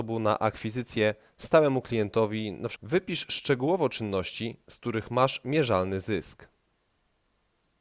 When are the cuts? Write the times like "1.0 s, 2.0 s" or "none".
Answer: 2.8 s